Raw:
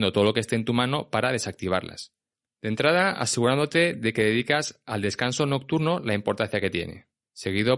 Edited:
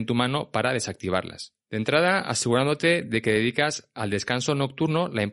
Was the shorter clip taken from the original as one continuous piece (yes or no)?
no